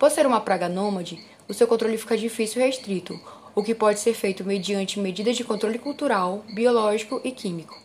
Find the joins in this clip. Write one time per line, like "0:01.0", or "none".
none